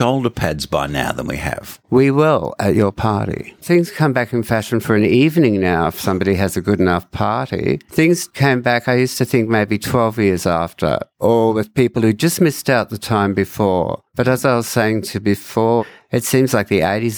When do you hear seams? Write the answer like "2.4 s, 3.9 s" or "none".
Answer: 3.6 s